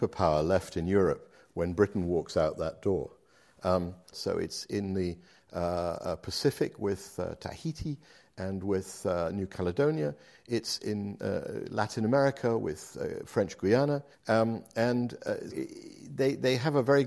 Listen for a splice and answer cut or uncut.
cut